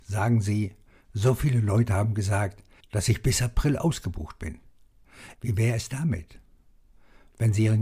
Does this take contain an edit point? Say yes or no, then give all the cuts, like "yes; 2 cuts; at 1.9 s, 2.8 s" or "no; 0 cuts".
yes; 2 cuts; at 2.8 s, 5.3 s